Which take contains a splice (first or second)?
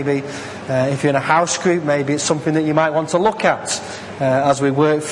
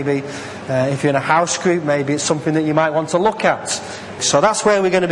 second